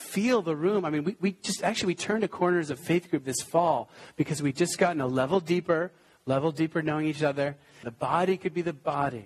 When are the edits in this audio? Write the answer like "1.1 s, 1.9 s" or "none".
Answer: 7.8 s